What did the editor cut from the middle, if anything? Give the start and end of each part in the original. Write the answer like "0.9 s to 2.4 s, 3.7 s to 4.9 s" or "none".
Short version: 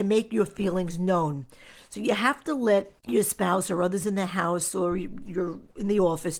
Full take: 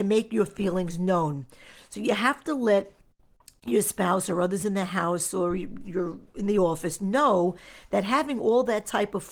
3.0 s to 3.6 s